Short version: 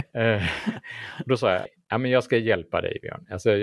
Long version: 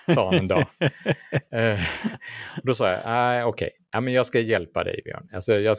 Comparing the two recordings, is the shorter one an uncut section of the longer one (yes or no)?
no